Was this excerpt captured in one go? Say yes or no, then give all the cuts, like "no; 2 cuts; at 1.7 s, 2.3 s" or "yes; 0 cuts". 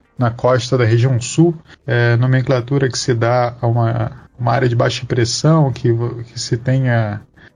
no; 1 cut; at 4.3 s